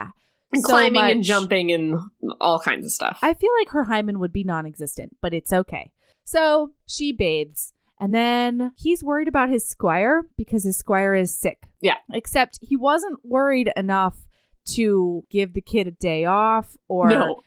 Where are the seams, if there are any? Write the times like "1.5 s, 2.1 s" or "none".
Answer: none